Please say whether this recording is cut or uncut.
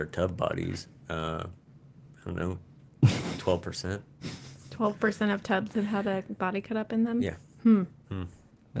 uncut